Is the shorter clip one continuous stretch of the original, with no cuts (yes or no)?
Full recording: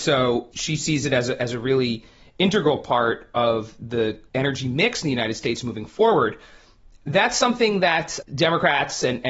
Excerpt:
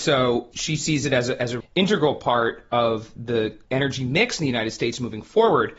no